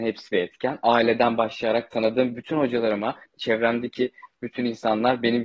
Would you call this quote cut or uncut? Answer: cut